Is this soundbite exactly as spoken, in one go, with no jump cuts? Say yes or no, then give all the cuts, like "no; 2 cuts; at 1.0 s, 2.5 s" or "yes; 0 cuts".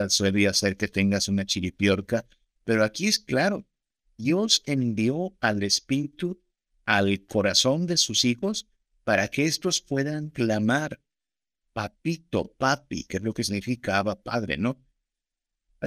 yes; 0 cuts